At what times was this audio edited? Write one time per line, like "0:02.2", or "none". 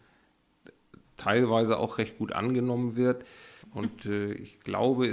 0:03.6